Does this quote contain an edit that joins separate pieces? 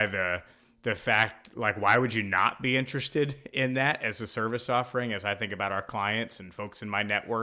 no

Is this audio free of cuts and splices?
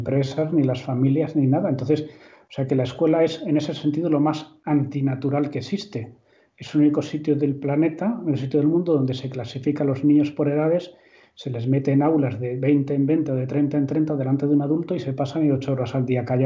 yes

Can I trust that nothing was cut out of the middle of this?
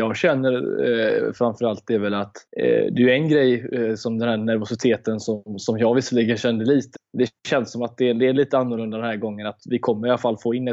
no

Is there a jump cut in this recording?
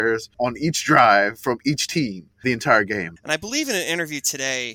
yes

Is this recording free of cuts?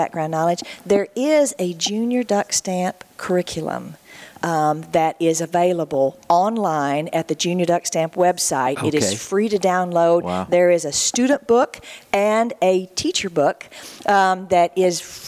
yes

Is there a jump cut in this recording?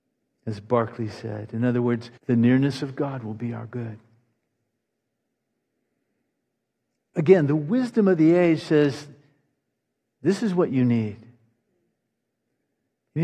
yes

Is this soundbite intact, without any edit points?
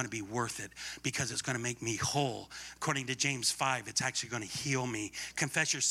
yes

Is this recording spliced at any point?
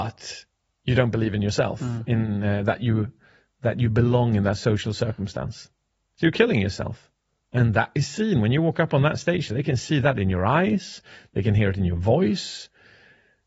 no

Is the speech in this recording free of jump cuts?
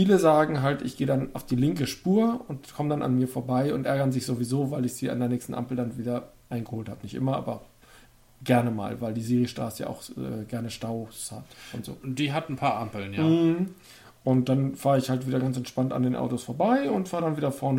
yes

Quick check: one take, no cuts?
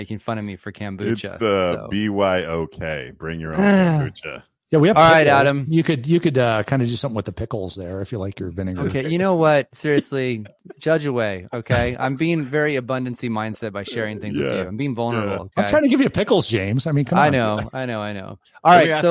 yes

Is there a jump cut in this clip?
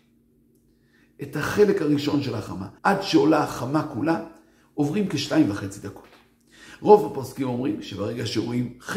yes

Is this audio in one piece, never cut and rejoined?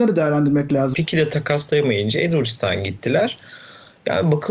no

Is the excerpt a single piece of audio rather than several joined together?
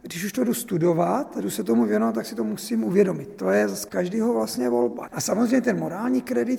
no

